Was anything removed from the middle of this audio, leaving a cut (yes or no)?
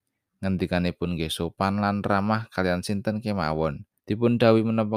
yes